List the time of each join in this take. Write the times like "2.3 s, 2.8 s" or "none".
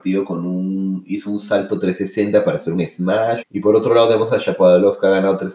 3.4 s